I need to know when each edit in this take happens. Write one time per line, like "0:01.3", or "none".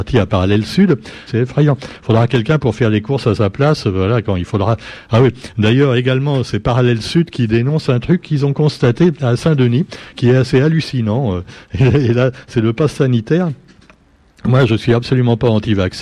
0:01.3
0:14.7